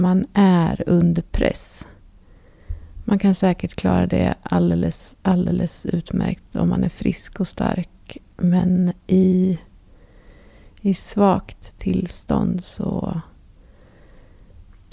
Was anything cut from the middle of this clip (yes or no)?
no